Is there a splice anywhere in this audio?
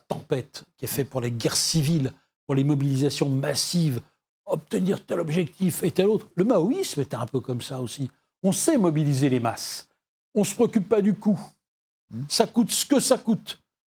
no; 0 cuts

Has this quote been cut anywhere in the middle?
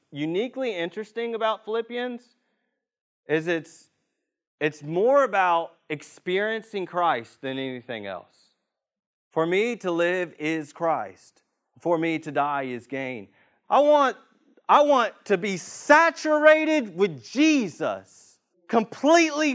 yes; 2 cuts; at 13.6 s, 18.5 s

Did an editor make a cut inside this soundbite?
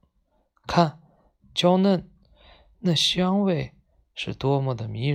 yes; 1 cut; at 1.4 s

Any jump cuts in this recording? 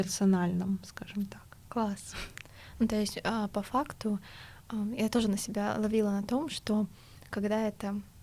yes; 1 cut; at 1.6 s

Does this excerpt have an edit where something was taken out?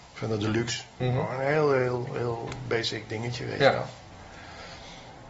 no; 0 cuts

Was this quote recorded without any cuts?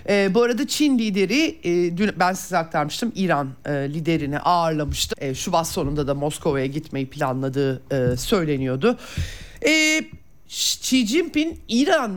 no; 1 cut; at 5.1 s

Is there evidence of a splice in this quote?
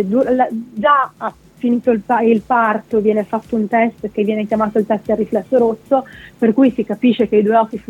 no; 0 cuts

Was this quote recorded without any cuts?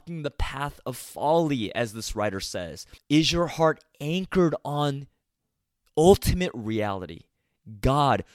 no; 1 cut; at 3.0 s

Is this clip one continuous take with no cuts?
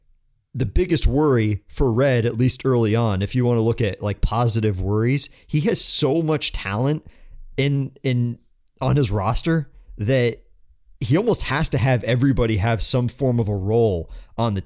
yes; 0 cuts

